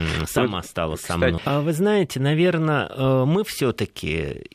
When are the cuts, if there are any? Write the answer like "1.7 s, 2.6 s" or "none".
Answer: 1.4 s